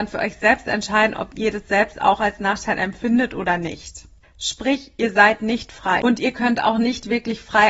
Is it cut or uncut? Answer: cut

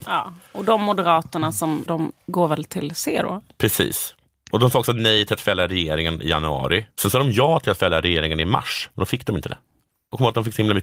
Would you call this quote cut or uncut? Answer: cut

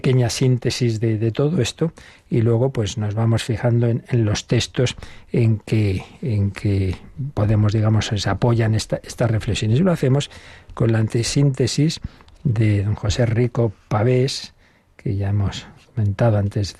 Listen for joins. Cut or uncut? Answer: uncut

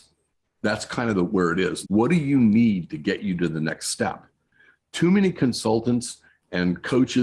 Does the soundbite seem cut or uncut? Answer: cut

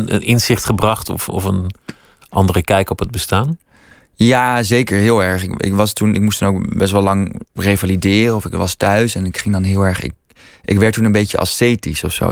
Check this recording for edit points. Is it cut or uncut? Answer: uncut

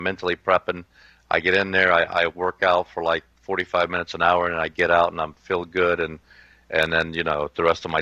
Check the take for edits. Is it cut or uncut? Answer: uncut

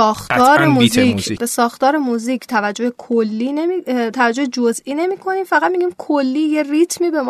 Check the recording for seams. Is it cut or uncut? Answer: cut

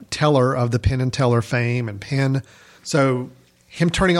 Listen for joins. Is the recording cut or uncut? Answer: cut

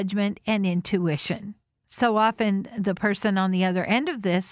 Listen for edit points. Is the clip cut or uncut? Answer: uncut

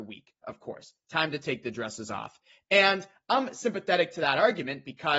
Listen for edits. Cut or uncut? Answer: uncut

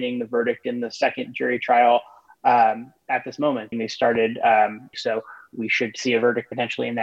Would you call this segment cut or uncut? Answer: cut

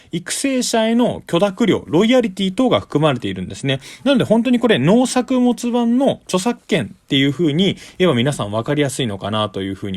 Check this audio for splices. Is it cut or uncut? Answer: uncut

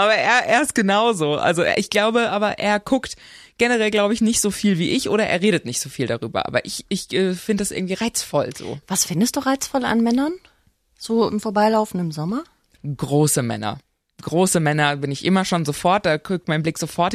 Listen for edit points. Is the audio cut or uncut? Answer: uncut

